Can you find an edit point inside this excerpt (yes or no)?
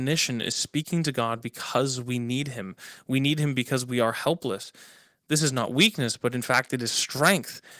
no